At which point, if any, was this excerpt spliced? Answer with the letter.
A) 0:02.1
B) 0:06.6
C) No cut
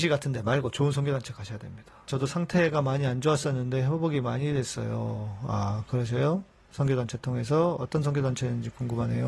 A